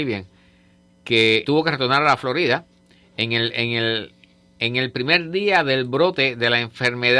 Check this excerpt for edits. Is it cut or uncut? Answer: cut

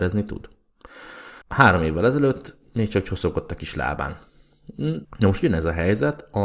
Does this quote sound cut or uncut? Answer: cut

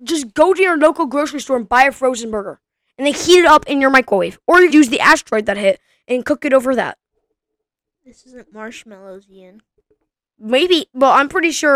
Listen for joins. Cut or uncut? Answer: cut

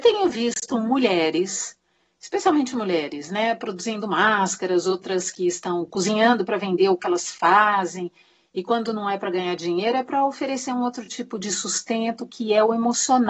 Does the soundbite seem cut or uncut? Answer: uncut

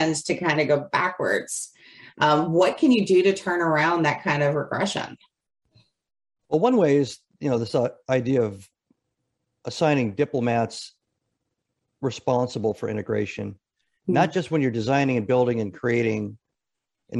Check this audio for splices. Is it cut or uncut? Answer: uncut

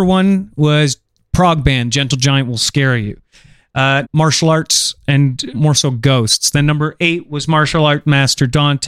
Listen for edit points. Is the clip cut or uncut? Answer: cut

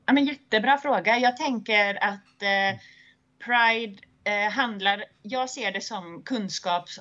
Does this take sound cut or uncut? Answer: uncut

